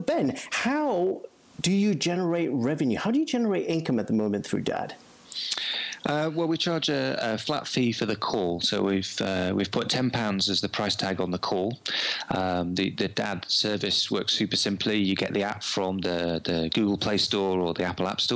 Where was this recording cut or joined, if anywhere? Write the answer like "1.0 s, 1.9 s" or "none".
none

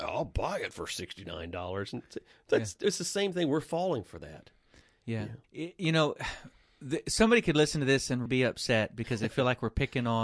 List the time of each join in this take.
5.4 s, 8.3 s

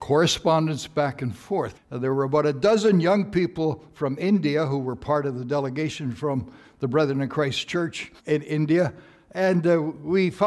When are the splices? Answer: 1.7 s, 8.2 s

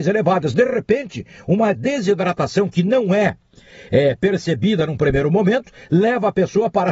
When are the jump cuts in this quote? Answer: none

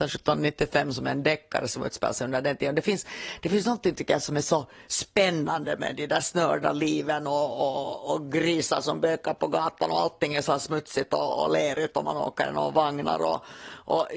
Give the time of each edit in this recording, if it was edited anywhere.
none

